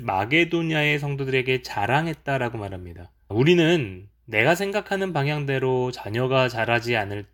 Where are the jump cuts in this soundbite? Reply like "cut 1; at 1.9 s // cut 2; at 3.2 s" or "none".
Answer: cut 1; at 3.3 s